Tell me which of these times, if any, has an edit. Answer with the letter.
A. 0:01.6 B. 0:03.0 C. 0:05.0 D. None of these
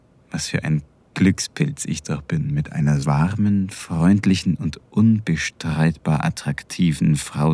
B